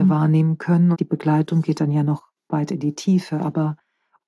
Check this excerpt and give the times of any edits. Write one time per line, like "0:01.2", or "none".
0:00.9